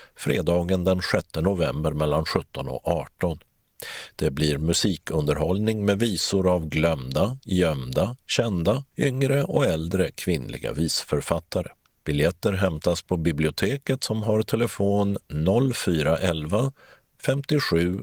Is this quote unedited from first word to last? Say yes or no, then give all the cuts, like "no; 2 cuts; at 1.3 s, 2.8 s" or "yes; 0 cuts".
no; 2 cuts; at 8.9 s, 12.0 s